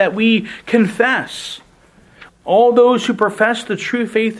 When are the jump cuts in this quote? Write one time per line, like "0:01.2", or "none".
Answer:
0:02.3